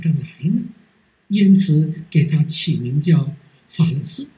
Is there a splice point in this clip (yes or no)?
no